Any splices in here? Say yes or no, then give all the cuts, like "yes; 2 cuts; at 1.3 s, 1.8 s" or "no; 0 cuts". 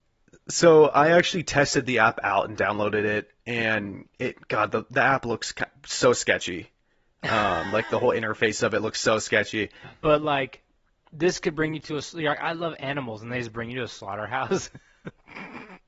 yes; 1 cut; at 9.8 s